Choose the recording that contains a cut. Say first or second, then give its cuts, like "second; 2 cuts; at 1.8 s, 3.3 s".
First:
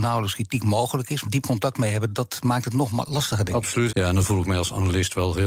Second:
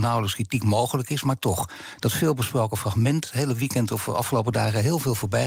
first; 2 cuts; at 1.2 s, 3.9 s